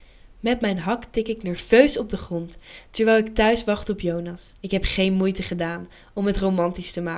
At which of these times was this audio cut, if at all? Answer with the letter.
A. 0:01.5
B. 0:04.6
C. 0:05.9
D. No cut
B